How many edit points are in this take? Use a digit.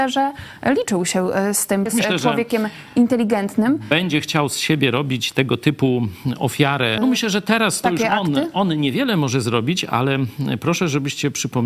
2